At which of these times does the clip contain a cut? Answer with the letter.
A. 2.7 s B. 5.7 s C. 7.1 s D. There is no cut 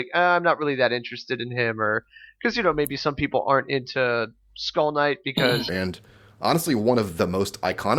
B